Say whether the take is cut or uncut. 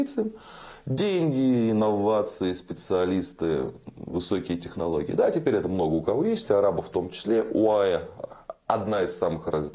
uncut